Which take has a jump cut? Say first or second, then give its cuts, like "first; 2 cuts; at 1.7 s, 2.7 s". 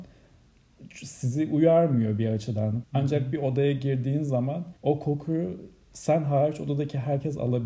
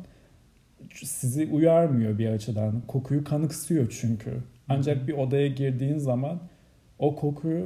first; 2 cuts; at 2.8 s, 4.8 s